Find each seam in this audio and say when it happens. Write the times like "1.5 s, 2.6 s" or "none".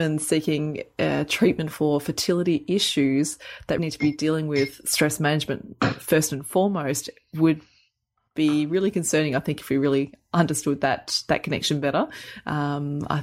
3.8 s